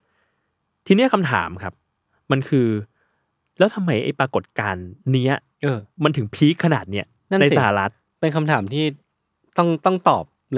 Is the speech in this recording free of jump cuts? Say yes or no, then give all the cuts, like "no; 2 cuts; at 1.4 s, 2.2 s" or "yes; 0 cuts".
no; 1 cut; at 5.0 s